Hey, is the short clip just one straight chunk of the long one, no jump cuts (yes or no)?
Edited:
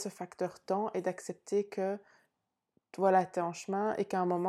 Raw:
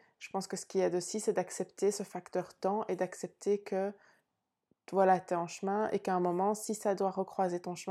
yes